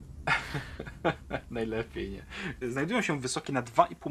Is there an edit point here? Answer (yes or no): yes